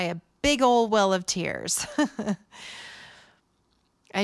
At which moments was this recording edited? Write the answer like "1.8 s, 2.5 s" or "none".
none